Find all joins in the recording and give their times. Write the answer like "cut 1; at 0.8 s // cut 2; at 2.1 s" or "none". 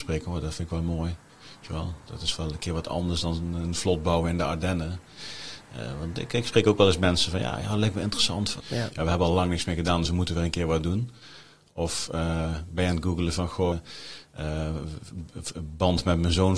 cut 1; at 8.6 s // cut 2; at 13.7 s